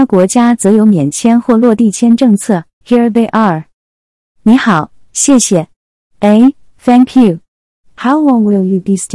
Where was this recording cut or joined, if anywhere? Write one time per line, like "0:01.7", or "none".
0:02.8
0:06.1